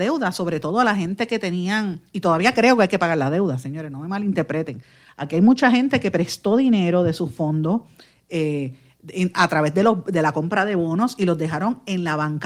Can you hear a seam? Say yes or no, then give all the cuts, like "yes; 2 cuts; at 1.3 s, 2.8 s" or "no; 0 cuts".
no; 0 cuts